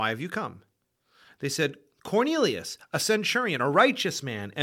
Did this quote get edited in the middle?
no; 0 cuts

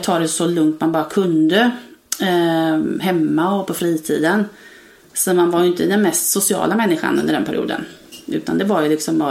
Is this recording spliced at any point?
no; 0 cuts

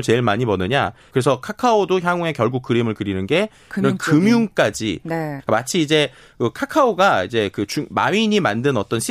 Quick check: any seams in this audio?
yes; 2 cuts; at 1.1 s, 5.4 s

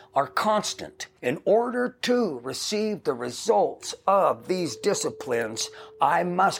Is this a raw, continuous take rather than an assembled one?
no; 1 cut; at 1.2 s

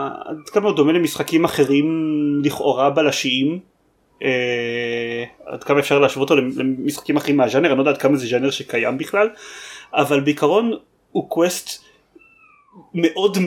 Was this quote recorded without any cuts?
yes; 0 cuts

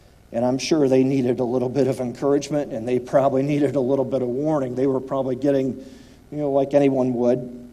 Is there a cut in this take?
no; 0 cuts

